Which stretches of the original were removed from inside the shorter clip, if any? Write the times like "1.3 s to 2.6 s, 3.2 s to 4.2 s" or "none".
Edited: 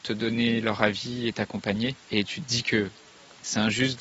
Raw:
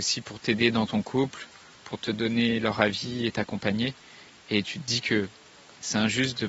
4.0 s to 4.4 s